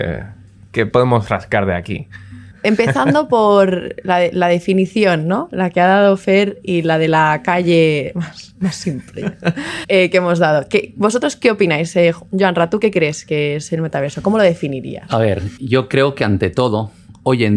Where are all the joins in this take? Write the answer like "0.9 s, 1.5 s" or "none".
9.8 s, 15.6 s